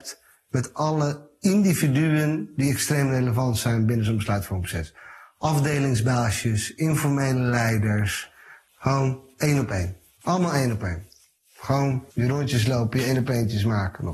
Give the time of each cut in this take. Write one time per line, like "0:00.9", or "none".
0:08.7
0:10.2
0:12.1